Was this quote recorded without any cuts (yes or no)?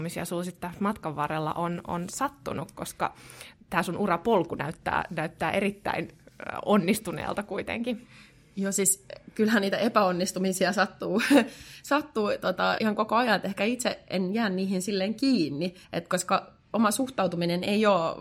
no